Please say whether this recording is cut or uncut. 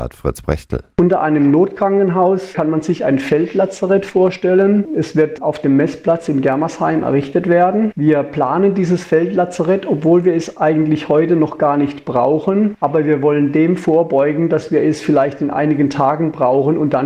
uncut